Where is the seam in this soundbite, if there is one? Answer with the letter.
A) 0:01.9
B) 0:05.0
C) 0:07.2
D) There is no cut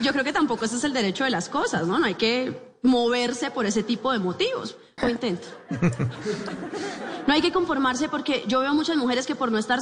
B